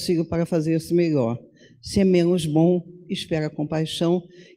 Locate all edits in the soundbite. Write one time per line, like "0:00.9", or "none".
none

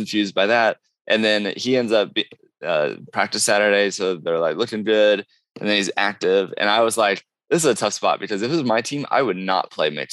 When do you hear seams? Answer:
none

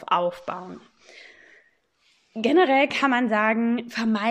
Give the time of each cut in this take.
none

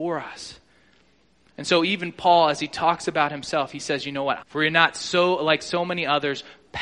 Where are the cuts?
0:04.4

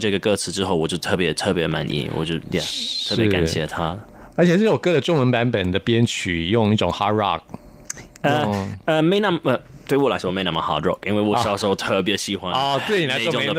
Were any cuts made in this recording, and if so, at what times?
none

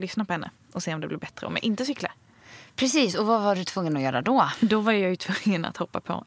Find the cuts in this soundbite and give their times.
none

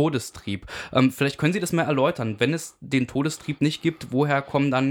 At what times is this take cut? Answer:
none

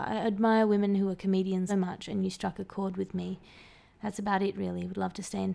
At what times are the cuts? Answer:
0:01.7

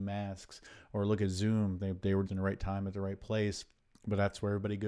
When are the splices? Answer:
0:02.3

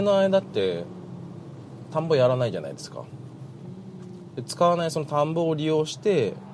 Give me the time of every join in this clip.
none

